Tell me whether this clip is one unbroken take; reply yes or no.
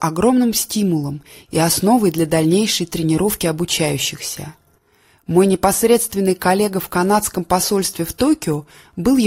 yes